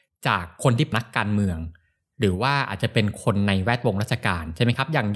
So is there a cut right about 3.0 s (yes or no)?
no